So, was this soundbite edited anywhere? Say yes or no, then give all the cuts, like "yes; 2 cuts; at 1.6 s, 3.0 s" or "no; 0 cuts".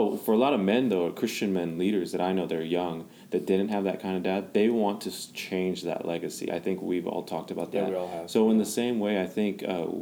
no; 0 cuts